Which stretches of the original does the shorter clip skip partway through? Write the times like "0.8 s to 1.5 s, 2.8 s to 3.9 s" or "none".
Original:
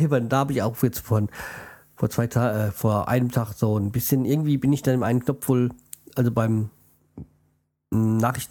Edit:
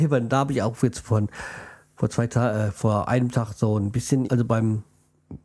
4.2 s to 6.1 s